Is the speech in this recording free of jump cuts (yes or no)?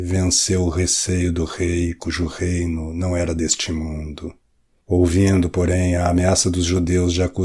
no